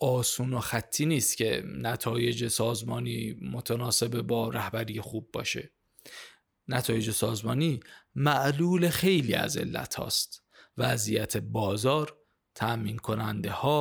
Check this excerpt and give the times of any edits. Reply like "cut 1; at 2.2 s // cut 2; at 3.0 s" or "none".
none